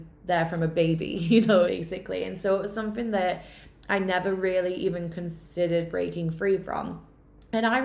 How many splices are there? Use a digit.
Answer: 1